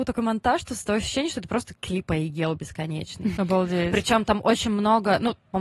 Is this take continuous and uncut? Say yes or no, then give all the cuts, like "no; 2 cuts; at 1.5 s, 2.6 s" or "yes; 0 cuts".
no; 1 cut; at 3.4 s